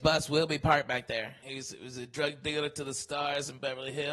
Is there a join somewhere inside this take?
yes; 1 cut; at 1.4 s

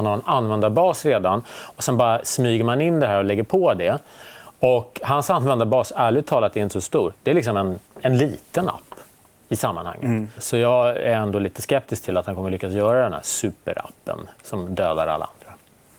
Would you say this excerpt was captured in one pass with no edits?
no; 2 cuts; at 7.1 s, 10.4 s

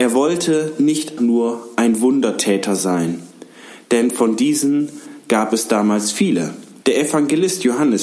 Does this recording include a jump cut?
yes; 2 cuts; at 1.2 s, 6.8 s

